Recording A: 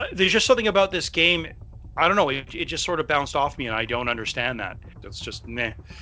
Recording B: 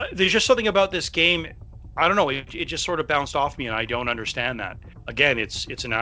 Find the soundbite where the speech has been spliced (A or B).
A